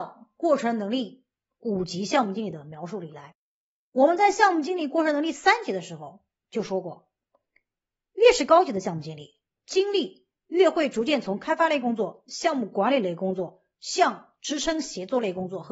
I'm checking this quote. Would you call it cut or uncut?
uncut